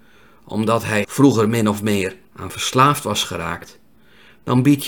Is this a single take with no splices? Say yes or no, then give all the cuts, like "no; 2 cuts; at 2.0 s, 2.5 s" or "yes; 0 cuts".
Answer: no; 2 cuts; at 1.0 s, 2.2 s